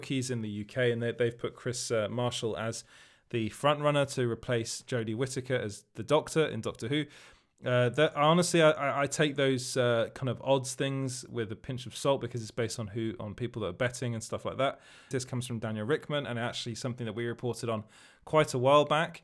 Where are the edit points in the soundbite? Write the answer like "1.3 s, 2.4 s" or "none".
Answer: 15.1 s